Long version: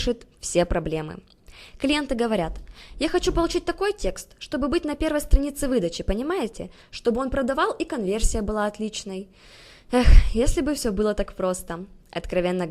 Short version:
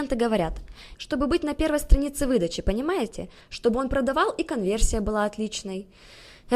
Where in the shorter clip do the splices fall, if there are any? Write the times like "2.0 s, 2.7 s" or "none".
0.9 s